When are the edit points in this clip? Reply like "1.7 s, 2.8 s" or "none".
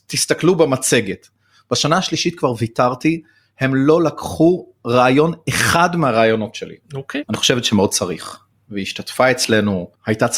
7.2 s